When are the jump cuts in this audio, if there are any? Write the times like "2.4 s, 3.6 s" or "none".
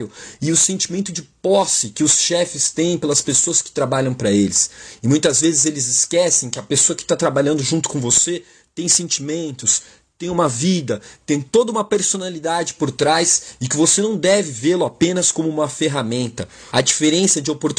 16.7 s